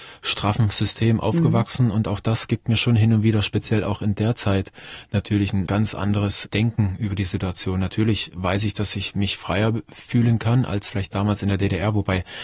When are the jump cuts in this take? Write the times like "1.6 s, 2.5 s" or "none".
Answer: none